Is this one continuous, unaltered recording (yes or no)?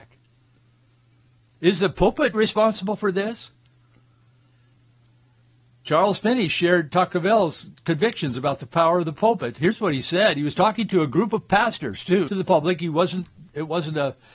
no